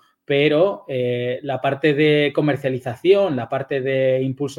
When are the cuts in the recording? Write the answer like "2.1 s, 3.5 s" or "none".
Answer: none